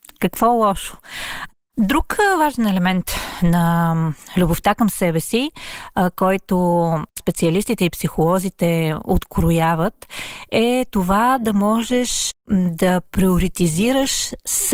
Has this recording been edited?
yes; 1 cut; at 1.6 s

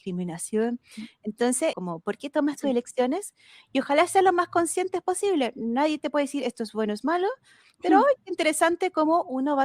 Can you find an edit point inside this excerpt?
yes; 1 cut; at 1.7 s

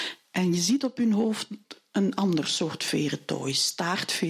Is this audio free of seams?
yes; 0 cuts

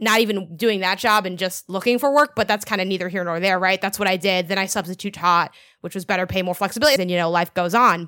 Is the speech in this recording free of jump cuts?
no; 1 cut; at 7.0 s

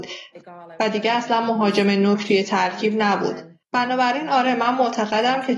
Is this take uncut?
no; 1 cut; at 3.6 s

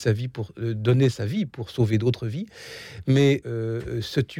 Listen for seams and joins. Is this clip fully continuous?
no; 1 cut; at 3.4 s

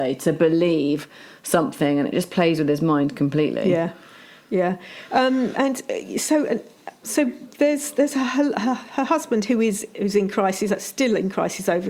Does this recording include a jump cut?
yes; 1 cut; at 5.5 s

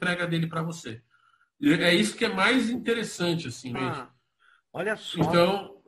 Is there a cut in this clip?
yes; 1 cut; at 3.8 s

